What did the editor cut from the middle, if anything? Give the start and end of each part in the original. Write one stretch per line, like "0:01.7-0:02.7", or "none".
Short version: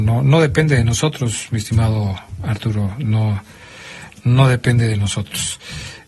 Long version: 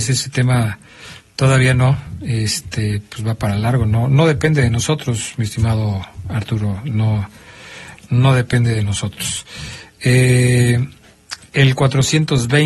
none